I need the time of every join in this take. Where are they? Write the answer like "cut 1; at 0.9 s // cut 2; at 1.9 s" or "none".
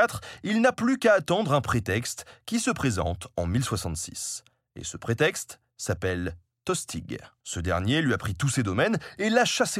cut 1; at 7.4 s